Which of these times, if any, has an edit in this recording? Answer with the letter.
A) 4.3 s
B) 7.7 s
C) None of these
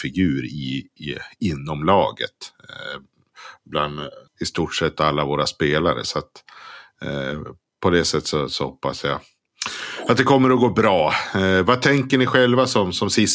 A